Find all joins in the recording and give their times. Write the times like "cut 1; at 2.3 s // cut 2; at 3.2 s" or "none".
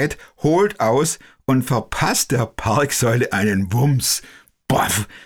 none

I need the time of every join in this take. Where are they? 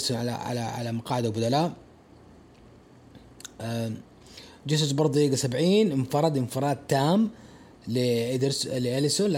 none

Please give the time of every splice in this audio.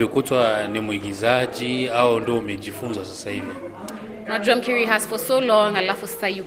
cut 1; at 4.2 s

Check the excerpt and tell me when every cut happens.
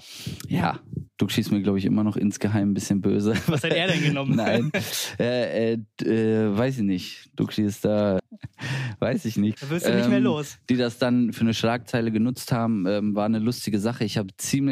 cut 1; at 1.1 s // cut 2; at 8.2 s // cut 3; at 9.6 s

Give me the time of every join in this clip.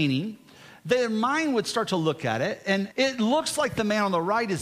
cut 1; at 2.9 s

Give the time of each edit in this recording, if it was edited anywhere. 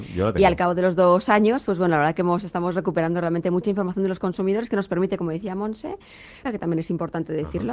cut 1; at 6.4 s

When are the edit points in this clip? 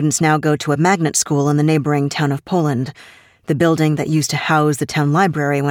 none

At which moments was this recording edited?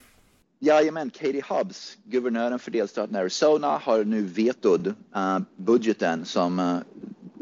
none

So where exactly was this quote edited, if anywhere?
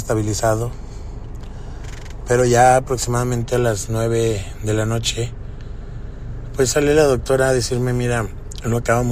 none

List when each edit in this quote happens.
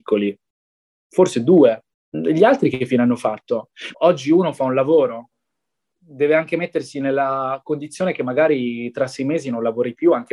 cut 1; at 3.9 s

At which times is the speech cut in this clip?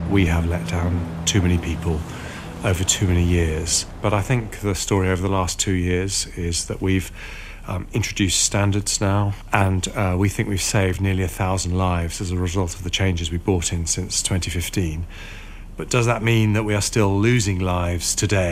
none

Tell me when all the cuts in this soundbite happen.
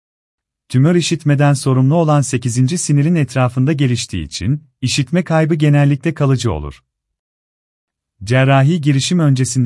none

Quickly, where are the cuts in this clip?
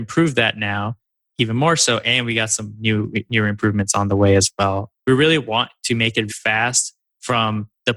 cut 1; at 5.0 s // cut 2; at 6.3 s

